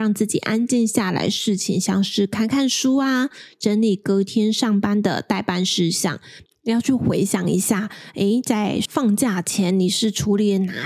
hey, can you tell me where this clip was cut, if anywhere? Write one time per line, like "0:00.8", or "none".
0:06.5